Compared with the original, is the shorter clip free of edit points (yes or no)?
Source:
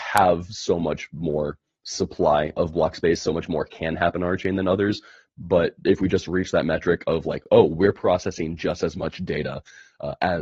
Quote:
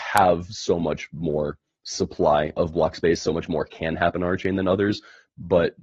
yes